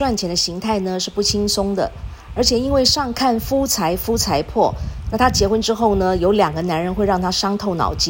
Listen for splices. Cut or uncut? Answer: uncut